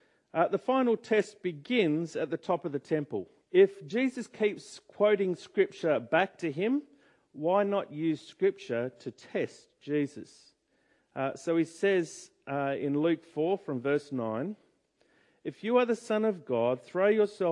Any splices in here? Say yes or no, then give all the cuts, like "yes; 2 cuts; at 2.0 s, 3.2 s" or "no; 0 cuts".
yes; 1 cut; at 3.4 s